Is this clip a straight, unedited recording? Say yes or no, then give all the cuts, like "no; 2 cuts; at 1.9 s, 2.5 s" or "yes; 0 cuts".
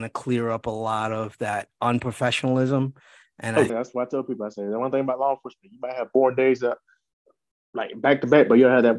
no; 1 cut; at 3.7 s